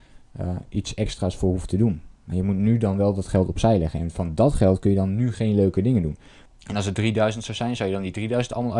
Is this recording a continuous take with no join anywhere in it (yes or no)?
no